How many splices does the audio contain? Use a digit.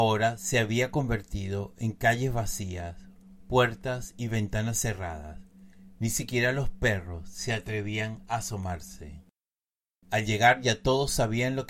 1